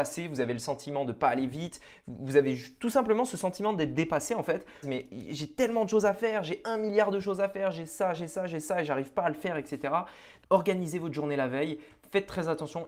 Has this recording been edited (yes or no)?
yes